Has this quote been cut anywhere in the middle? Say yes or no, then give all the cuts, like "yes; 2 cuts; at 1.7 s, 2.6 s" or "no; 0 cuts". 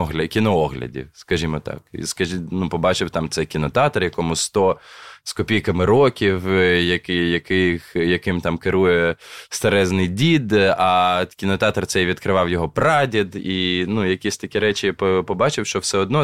no; 0 cuts